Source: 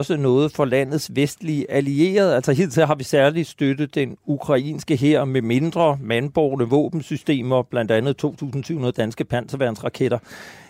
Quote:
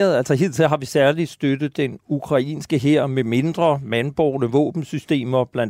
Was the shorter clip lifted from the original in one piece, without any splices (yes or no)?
yes